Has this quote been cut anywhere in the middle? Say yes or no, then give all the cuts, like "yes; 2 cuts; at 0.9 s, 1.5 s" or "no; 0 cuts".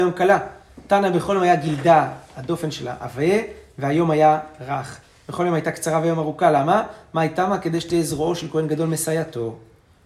no; 0 cuts